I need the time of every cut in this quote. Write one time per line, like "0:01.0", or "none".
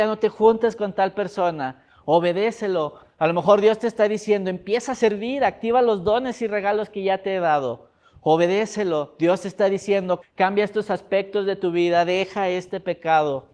0:10.2